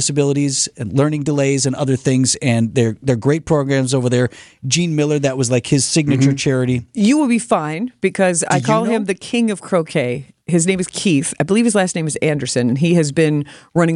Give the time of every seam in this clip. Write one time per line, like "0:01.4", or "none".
0:06.9

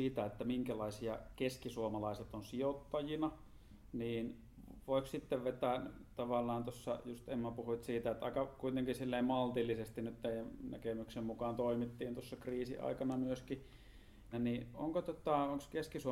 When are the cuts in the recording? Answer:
0:14.3

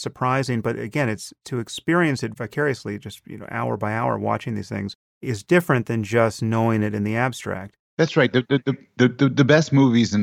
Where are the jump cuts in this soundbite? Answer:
none

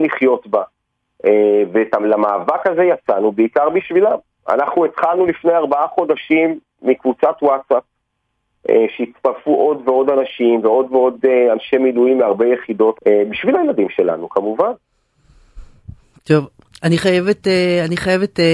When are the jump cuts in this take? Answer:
0:12.9

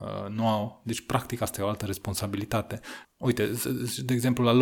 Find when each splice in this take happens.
0:03.0

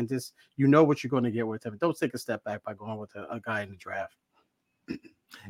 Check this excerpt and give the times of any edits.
none

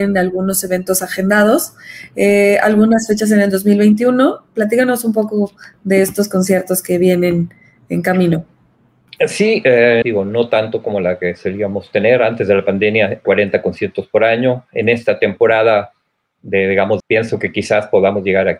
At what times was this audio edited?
0:10.0
0:13.2
0:17.0

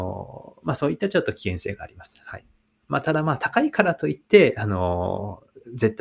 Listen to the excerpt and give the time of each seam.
none

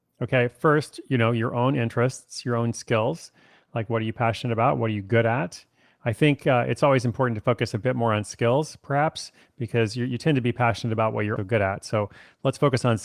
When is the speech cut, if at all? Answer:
0:11.4

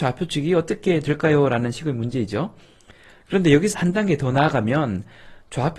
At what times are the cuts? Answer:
0:03.7

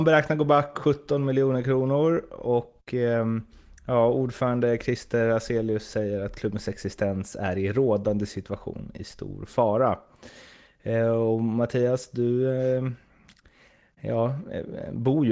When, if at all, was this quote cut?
none

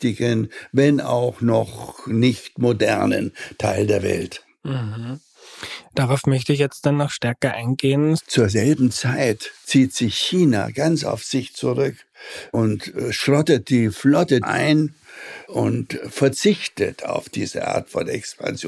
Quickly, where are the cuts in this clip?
0:08.2
0:14.4

